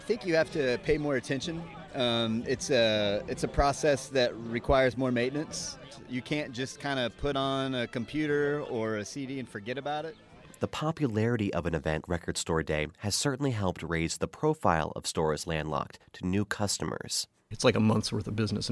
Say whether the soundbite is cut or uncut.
cut